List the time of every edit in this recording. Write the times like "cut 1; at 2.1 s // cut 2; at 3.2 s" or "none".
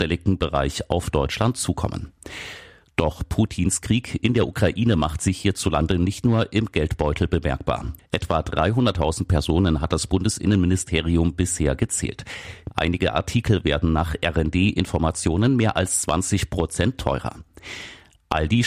cut 1; at 8.0 s // cut 2; at 12.7 s